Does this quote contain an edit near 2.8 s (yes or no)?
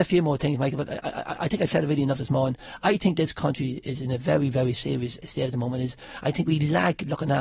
no